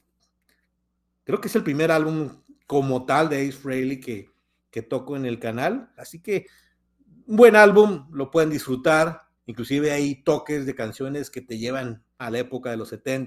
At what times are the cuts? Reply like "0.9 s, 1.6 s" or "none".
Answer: 6.0 s, 9.4 s, 12.2 s